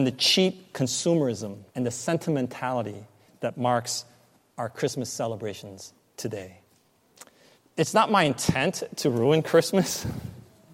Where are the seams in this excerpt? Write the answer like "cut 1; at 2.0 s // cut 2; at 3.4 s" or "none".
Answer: cut 1; at 1.7 s // cut 2; at 7.5 s